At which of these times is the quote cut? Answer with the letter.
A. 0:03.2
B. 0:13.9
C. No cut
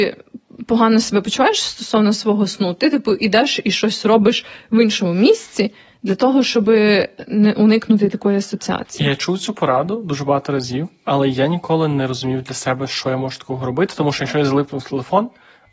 C